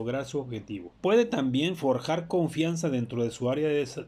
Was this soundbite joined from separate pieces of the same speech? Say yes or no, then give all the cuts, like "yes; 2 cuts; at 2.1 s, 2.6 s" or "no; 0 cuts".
yes; 1 cut; at 1.0 s